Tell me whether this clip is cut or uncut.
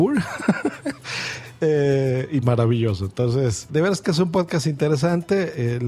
cut